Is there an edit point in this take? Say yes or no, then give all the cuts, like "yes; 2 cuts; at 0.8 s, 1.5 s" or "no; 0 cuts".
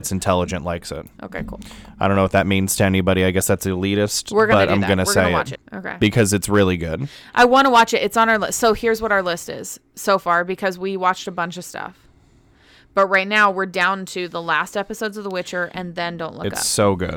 yes; 1 cut; at 5.5 s